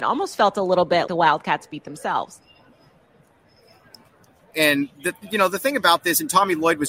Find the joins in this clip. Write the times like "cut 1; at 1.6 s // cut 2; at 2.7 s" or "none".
cut 1; at 1.1 s // cut 2; at 4.5 s